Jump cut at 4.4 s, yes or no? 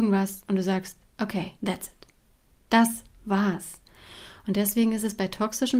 no